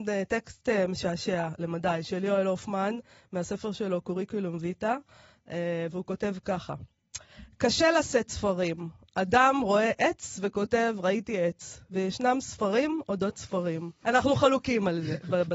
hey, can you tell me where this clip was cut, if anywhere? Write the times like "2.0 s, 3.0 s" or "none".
14.0 s